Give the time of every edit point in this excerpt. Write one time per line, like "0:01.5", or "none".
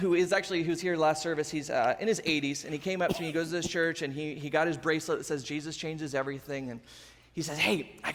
none